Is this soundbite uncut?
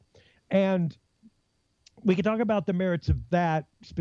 yes; 0 cuts

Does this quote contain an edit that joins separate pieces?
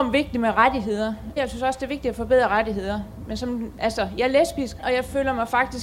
yes; 2 cuts; at 1.4 s, 4.8 s

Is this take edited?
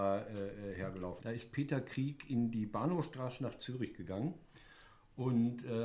yes; 1 cut; at 1.2 s

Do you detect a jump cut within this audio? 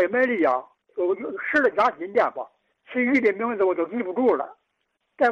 no; 0 cuts

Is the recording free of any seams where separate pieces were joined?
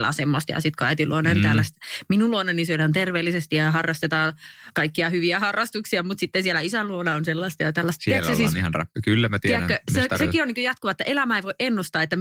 yes; 0 cuts

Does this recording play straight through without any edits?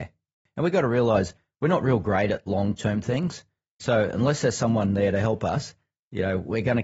yes; 0 cuts

